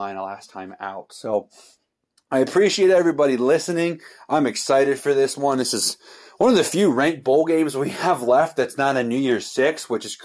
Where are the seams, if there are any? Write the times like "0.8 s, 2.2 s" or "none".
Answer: none